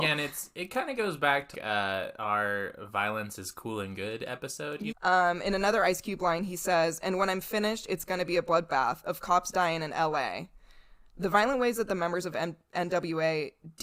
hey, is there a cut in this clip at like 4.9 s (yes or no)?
yes